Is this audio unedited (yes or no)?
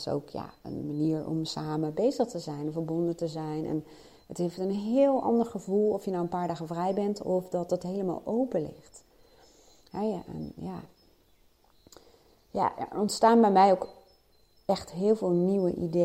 yes